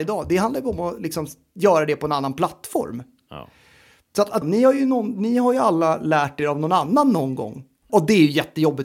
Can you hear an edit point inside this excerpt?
yes; 2 cuts; at 4.4 s, 7.9 s

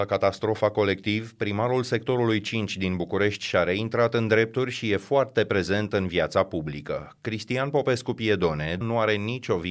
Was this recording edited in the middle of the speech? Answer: yes; 1 cut; at 8.8 s

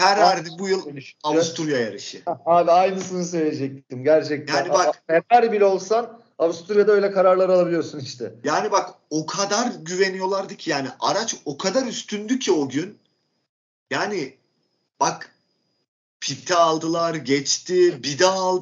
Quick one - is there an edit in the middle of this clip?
no; 0 cuts

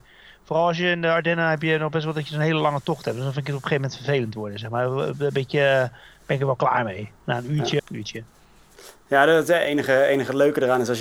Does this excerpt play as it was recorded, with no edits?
no; 1 cut; at 7.8 s

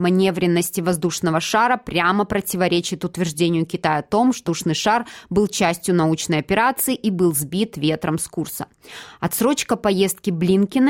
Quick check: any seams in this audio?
yes; 1 cut; at 4.5 s

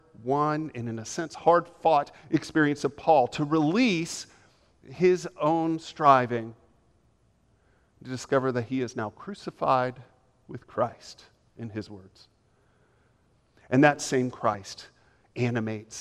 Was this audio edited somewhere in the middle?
no; 0 cuts

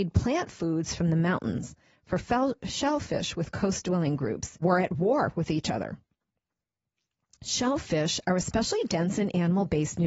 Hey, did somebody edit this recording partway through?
yes; 1 cut; at 4.6 s

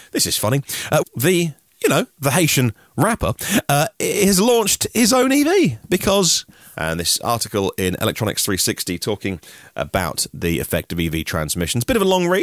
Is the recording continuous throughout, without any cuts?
no; 2 cuts; at 1.0 s, 6.7 s

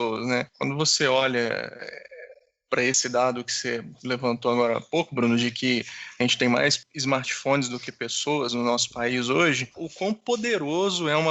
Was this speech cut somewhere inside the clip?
yes; 1 cut; at 9.7 s

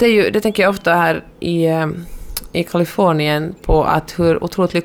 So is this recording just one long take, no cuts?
yes; 0 cuts

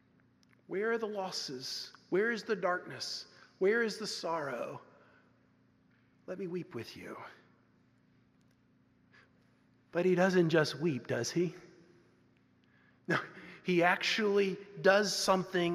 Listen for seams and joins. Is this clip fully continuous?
yes; 0 cuts

